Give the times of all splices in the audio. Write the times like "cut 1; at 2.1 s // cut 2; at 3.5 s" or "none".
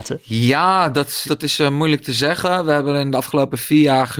cut 1; at 1.2 s